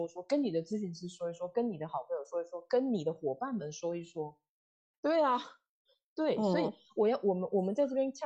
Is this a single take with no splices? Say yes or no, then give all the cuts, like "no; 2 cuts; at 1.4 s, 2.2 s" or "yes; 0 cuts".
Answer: no; 1 cut; at 4.9 s